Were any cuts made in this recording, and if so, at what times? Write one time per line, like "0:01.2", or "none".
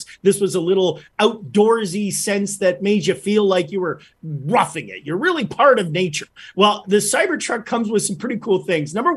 none